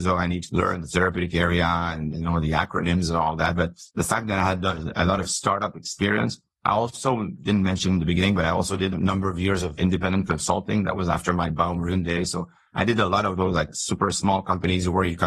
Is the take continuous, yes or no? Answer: yes